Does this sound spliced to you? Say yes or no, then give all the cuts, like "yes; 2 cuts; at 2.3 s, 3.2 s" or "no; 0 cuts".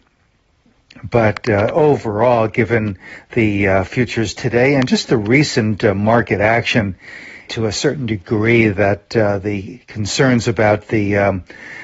yes; 1 cut; at 7.5 s